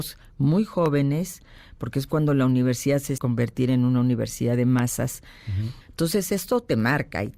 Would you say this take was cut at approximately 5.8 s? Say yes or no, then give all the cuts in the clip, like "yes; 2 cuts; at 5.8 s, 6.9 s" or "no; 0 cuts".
yes; 2 cuts; at 3.2 s, 5.8 s